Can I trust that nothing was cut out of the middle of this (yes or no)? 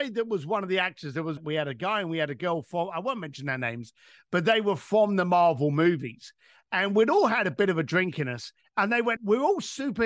no